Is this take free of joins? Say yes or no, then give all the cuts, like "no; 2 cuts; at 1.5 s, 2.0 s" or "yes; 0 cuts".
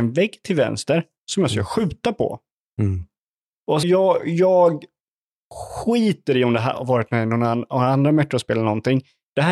no; 1 cut; at 3.8 s